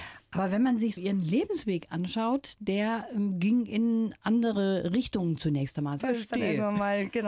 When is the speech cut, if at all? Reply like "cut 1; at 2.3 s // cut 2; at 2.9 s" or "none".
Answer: cut 1; at 1.0 s // cut 2; at 6.0 s